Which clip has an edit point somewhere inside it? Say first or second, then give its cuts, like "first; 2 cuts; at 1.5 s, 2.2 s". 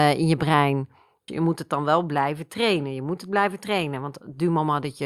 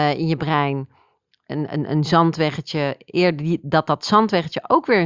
first; 1 cut; at 1.3 s